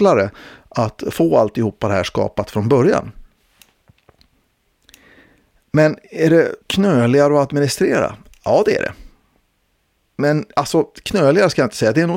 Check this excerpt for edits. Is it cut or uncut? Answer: cut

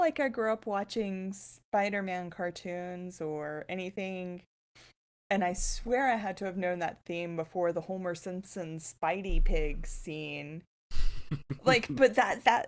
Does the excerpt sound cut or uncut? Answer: uncut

